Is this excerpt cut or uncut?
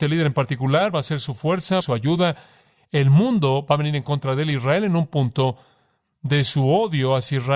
cut